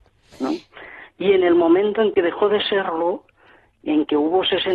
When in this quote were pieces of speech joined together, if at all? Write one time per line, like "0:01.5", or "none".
none